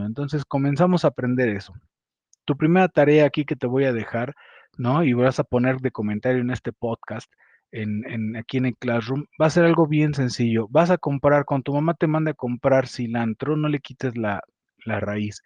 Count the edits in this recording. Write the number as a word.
one